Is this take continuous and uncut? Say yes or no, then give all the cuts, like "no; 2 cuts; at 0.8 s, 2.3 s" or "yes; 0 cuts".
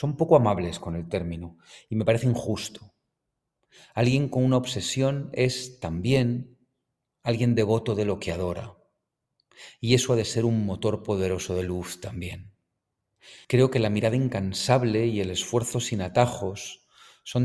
no; 1 cut; at 13.4 s